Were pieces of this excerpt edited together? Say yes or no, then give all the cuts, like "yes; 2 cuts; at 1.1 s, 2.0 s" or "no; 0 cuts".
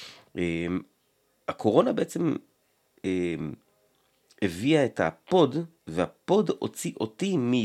no; 0 cuts